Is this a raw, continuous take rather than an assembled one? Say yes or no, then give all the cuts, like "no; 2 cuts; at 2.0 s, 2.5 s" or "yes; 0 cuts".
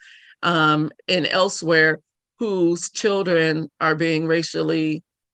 no; 1 cut; at 0.9 s